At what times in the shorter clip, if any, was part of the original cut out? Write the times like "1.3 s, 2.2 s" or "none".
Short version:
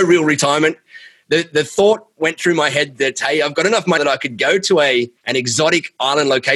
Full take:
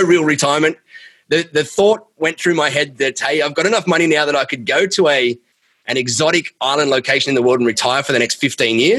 4.0 s, 5.2 s